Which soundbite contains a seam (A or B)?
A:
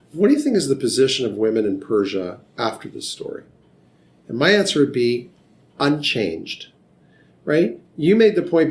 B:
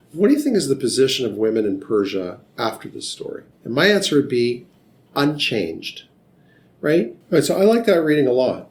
B